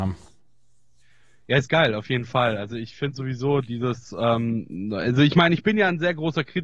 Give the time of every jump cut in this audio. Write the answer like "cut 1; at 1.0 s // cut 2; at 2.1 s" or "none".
none